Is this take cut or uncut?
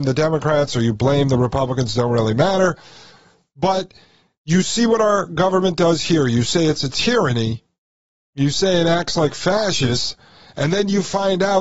uncut